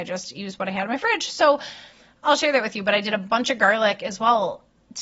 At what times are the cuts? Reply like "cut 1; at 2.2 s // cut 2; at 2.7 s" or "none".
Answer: none